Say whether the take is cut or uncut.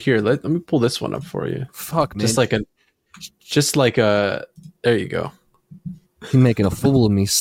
cut